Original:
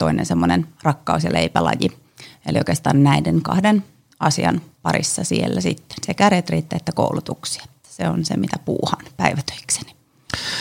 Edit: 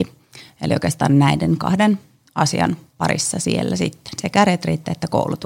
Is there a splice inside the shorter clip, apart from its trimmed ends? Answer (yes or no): no